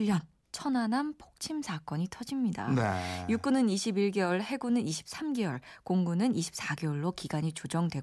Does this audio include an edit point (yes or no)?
no